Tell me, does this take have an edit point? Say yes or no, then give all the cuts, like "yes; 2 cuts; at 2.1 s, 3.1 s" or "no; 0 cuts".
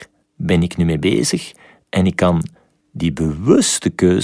no; 0 cuts